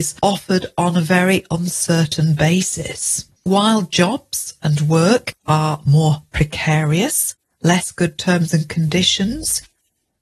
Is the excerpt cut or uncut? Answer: cut